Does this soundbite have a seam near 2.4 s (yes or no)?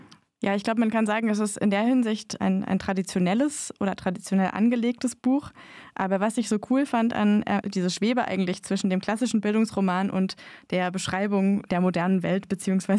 yes